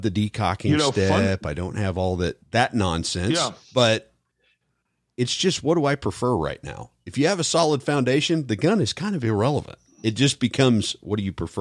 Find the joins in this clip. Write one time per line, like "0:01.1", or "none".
0:02.4
0:03.6